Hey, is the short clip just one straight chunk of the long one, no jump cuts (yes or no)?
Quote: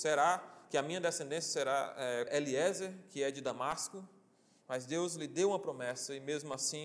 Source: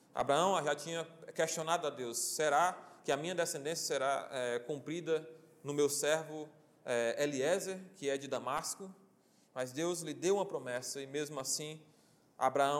no